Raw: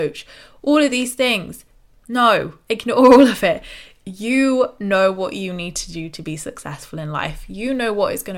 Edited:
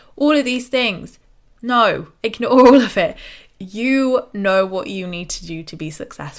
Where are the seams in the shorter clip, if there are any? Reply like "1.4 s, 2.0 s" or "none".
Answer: none